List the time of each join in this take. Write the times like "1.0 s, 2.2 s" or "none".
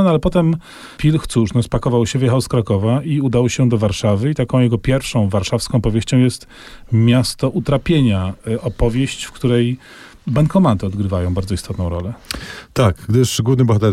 none